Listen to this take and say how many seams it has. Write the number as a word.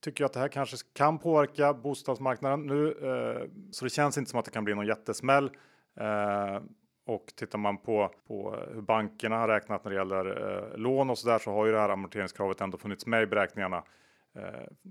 two